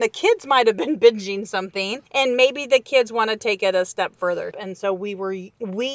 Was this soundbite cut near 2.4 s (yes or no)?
no